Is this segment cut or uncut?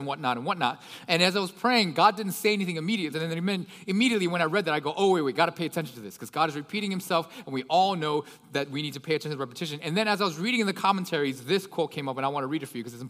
cut